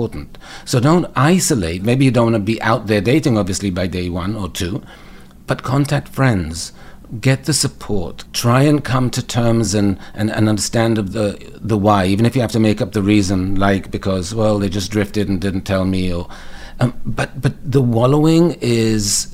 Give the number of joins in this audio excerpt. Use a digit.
0